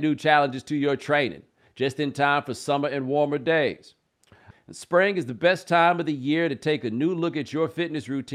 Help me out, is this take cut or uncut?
cut